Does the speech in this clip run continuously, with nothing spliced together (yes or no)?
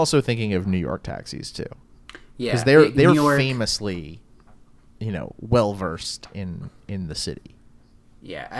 yes